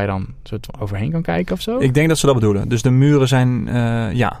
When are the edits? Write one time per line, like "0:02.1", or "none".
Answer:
none

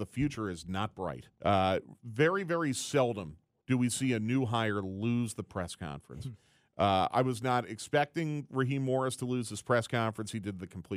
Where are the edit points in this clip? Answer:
0:01.3

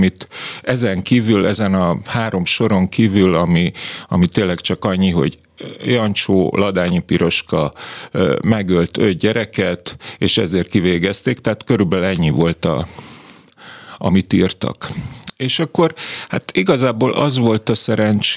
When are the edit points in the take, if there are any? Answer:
none

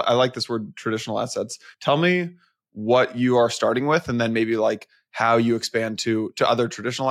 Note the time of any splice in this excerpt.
none

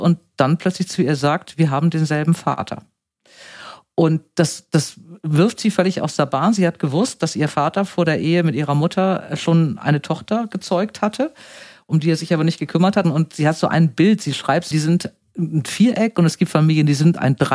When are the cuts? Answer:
0:13.0
0:14.7

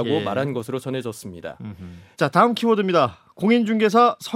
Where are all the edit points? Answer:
0:02.1

